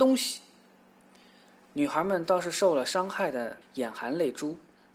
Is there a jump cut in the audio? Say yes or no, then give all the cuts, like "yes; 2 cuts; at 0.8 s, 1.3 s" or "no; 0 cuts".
yes; 1 cut; at 3.6 s